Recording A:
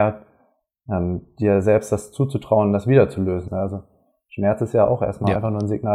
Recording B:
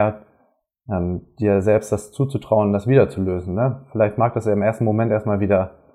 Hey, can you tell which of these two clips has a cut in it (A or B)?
A